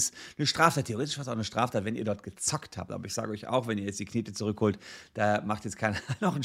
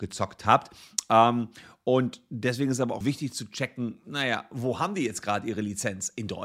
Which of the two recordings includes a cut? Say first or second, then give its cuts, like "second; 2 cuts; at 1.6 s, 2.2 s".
second; 1 cut; at 3.0 s